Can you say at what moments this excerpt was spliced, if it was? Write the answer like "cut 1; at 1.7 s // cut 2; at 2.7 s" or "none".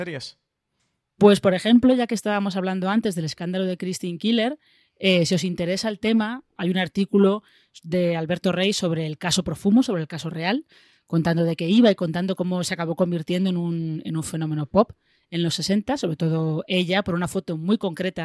cut 1; at 6.6 s